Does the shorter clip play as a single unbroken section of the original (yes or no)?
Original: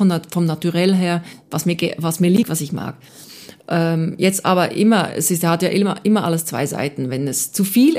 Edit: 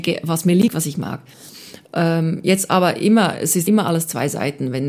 no